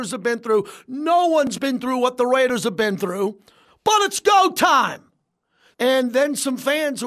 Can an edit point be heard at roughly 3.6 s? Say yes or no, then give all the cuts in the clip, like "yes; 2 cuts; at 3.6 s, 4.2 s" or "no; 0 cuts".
yes; 2 cuts; at 3.6 s, 5.7 s